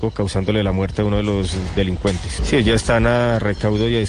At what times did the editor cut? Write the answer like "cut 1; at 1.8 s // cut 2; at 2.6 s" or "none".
cut 1; at 2.4 s